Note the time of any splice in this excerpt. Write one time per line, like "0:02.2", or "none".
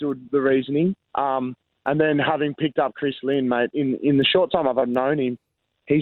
none